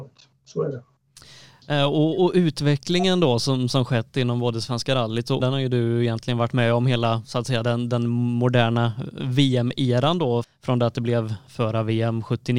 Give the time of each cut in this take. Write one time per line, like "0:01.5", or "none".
0:05.4
0:10.4